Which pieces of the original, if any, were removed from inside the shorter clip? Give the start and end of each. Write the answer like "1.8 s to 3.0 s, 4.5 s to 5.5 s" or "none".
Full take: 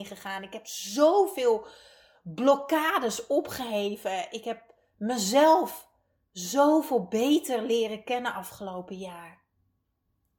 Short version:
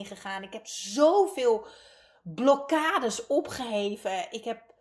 none